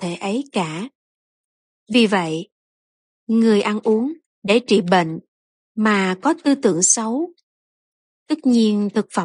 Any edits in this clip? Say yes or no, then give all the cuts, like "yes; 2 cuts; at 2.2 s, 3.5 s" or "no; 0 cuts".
no; 0 cuts